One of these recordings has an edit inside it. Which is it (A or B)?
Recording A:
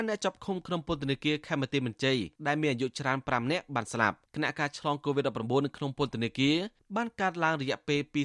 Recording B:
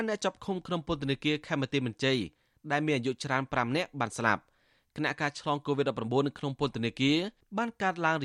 A